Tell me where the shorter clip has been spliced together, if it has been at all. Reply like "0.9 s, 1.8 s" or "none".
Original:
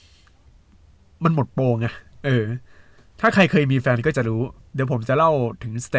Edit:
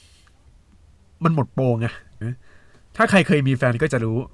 2.2 s